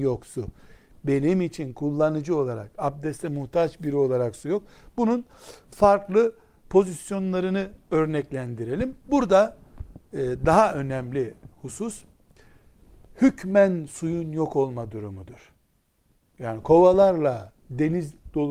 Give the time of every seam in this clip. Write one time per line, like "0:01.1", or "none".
0:09.0